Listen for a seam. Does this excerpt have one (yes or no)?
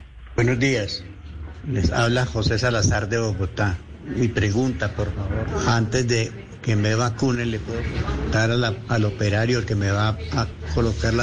no